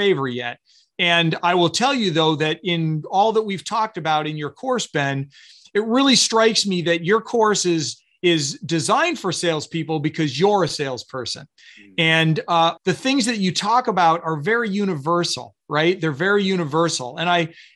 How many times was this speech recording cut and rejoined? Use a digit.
1